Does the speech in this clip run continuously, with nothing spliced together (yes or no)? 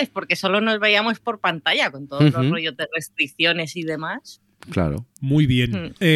yes